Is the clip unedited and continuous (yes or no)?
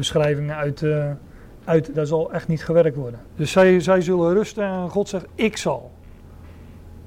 no